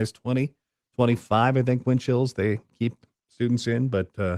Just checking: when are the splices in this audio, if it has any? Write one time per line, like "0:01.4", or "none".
none